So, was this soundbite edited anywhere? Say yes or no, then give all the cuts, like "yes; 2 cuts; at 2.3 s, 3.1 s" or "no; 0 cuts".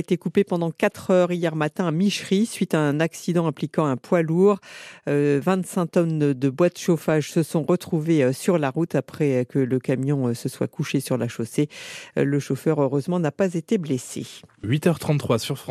no; 0 cuts